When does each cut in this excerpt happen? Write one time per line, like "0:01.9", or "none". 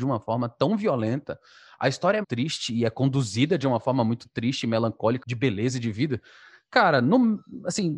0:02.2
0:05.2

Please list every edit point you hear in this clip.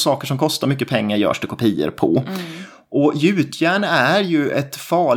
none

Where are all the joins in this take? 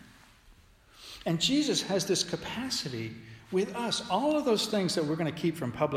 none

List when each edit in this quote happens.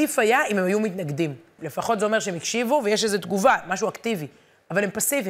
0:01.6

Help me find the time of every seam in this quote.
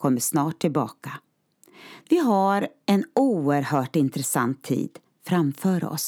0:02.0

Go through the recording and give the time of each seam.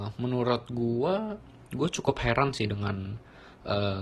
none

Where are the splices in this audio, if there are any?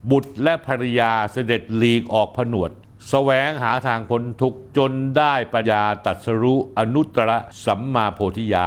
0:05.6

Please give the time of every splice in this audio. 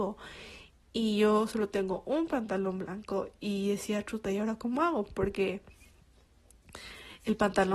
none

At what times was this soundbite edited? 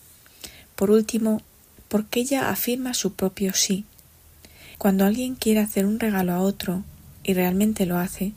0:01.8
0:04.7

